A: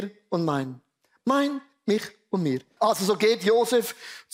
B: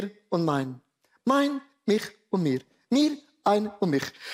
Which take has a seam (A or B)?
A